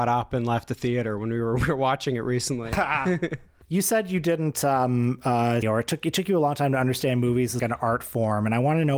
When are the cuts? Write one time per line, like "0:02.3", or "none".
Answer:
0:05.6
0:07.6